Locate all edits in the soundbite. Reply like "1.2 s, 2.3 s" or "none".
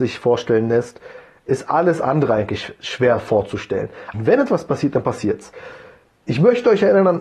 4.1 s